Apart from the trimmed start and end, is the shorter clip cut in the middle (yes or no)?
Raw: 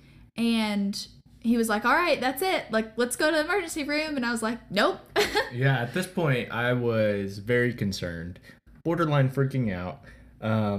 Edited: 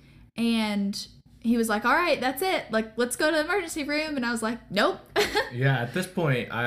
no